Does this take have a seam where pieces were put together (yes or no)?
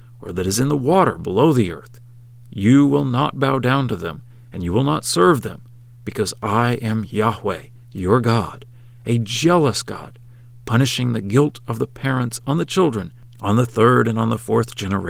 no